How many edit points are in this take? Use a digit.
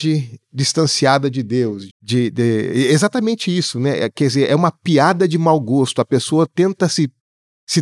1